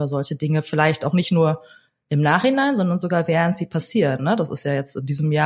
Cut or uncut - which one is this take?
uncut